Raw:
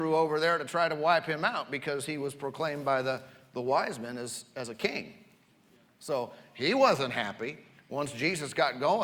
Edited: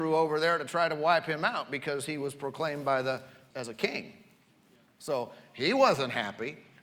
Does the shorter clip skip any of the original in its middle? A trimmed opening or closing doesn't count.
yes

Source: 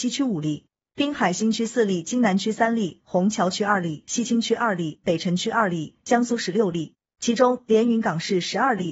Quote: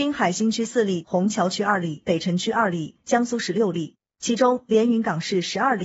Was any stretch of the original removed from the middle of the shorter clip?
yes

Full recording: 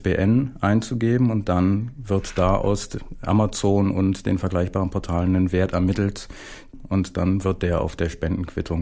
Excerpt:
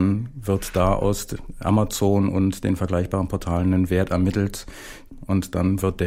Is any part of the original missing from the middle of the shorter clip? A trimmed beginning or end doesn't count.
no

